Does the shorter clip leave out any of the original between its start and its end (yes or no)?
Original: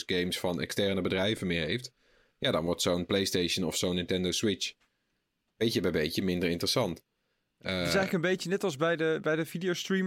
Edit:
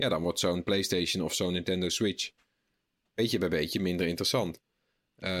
no